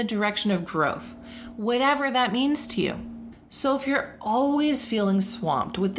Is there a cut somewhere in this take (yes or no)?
no